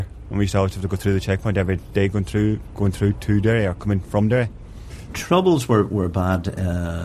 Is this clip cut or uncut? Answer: cut